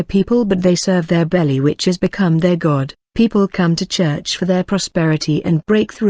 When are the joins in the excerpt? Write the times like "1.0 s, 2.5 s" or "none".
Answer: none